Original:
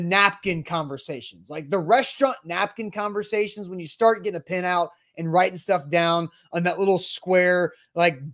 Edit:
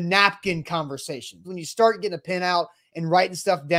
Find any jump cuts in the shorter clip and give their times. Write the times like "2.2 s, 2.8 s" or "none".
1.4 s